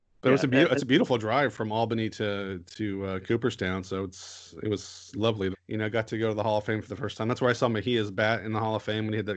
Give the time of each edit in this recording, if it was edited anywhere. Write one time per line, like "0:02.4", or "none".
0:05.5